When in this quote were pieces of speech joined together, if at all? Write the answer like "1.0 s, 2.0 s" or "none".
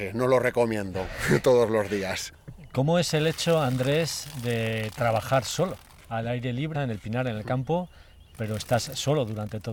6.7 s